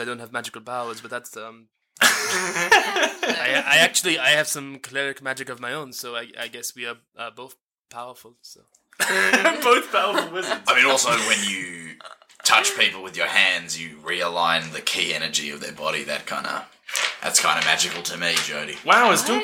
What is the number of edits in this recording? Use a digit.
0